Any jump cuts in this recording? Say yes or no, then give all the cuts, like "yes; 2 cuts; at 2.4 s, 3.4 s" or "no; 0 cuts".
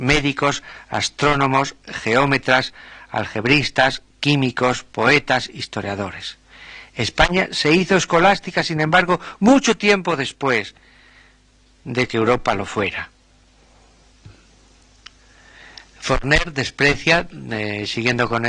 no; 0 cuts